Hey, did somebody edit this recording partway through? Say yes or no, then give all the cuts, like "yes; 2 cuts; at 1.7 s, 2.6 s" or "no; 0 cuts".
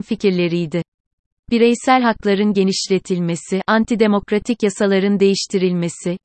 no; 0 cuts